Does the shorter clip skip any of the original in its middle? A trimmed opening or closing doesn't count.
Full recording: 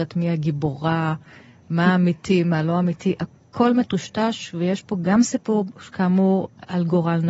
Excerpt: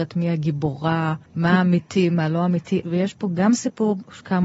yes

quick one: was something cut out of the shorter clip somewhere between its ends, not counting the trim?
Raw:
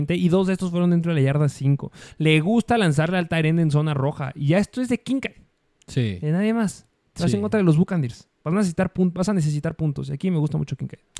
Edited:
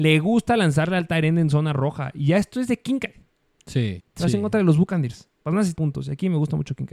yes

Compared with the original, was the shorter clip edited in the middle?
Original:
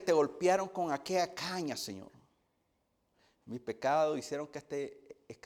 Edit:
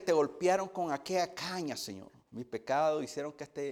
yes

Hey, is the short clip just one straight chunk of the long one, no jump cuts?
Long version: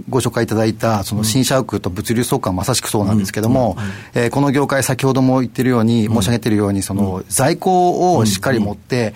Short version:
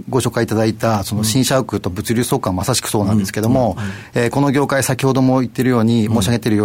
yes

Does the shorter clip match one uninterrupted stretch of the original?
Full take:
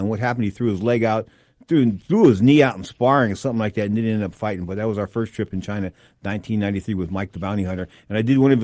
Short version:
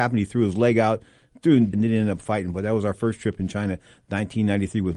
no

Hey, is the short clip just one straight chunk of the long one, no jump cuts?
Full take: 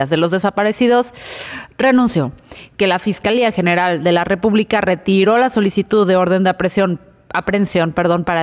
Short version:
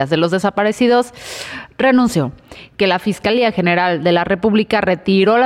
yes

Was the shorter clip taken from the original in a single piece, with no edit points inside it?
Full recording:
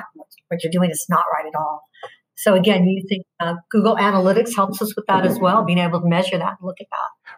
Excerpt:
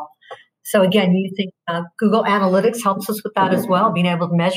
yes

